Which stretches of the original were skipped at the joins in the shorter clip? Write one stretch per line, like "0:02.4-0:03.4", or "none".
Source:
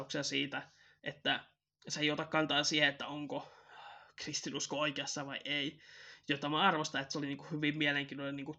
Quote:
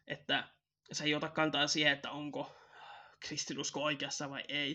none